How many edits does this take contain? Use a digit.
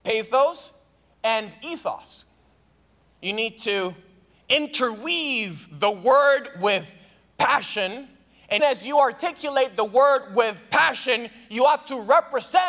1